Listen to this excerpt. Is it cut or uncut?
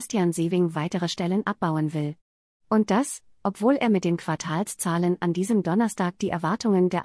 uncut